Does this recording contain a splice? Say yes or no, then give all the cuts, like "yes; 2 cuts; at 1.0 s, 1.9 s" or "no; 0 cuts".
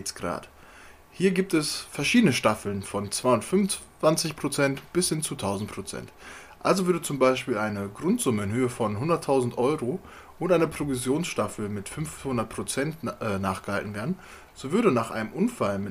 no; 0 cuts